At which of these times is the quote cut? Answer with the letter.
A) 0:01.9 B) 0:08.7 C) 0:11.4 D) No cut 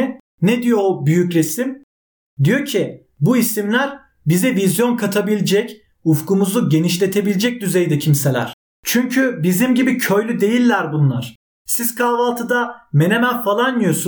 D